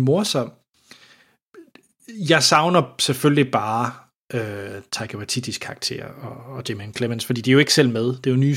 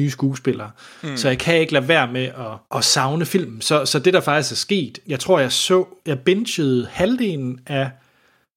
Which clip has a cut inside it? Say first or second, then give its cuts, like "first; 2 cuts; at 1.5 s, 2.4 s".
second; 2 cuts; at 2.7 s, 5.0 s